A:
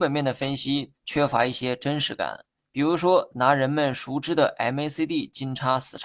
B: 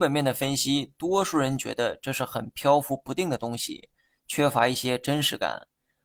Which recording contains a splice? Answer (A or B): A